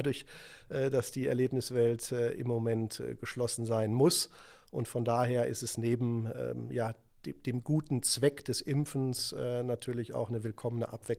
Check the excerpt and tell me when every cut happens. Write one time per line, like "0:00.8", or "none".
none